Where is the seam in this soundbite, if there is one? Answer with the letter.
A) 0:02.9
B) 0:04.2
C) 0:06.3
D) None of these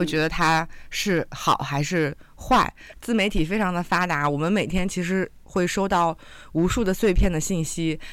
A